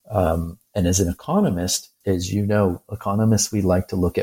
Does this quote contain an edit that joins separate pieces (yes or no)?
yes